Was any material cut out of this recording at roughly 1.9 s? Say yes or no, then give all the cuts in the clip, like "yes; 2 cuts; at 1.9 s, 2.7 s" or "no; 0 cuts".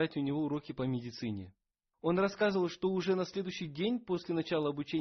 yes; 1 cut; at 1.9 s